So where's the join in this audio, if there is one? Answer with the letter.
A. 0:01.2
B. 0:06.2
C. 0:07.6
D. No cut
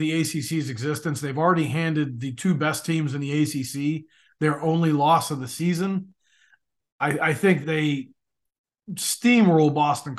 C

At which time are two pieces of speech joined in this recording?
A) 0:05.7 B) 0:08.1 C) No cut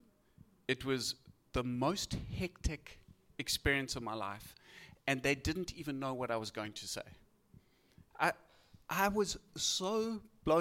B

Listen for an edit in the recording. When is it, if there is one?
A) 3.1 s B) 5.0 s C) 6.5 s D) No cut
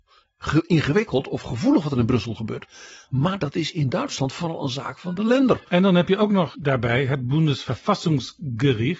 C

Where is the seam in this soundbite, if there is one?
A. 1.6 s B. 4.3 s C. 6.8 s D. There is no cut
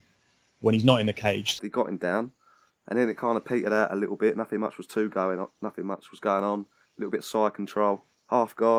A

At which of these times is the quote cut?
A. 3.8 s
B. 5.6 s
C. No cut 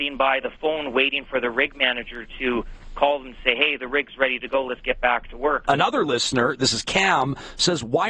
B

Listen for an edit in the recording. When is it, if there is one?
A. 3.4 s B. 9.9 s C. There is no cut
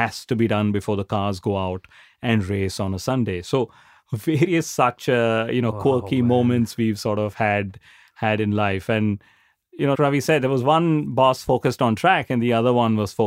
B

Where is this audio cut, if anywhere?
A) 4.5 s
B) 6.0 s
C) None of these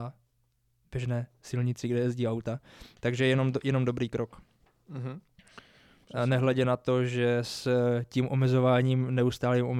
B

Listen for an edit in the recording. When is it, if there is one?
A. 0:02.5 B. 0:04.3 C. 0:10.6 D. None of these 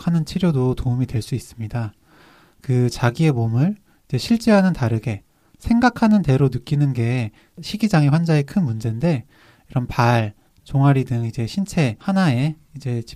C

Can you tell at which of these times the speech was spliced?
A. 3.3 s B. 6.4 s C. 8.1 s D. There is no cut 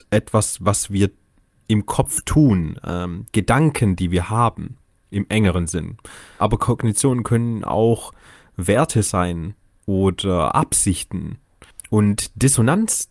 A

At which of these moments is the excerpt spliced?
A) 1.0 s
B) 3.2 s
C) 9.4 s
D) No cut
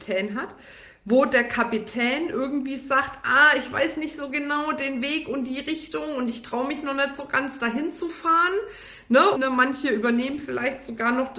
C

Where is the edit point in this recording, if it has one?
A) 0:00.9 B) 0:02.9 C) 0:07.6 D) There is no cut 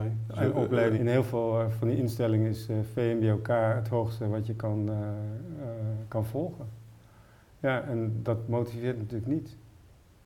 A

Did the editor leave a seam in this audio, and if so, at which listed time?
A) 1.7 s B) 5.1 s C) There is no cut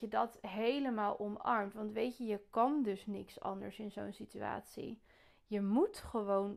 C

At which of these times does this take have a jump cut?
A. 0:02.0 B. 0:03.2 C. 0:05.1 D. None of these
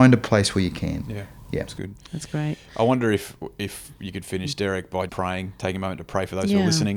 C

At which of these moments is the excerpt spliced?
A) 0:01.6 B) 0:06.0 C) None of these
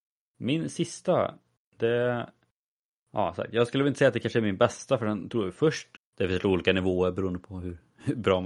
B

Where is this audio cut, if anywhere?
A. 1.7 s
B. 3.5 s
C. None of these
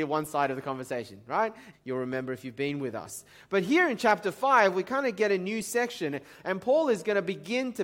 A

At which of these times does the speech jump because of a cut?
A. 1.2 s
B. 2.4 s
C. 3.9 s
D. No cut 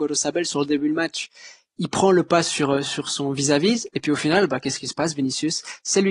D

